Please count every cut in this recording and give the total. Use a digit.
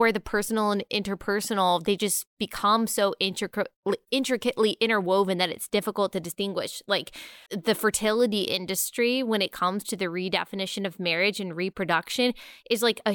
1